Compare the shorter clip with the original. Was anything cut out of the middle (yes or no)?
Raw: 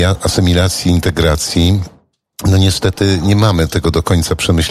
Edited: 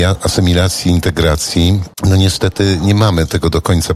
yes